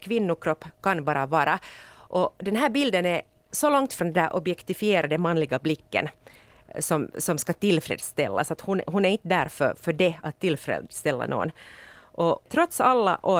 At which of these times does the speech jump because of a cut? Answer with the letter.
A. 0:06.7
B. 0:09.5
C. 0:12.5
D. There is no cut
C